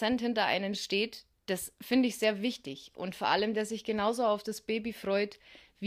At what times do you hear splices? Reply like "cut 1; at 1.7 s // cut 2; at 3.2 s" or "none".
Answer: none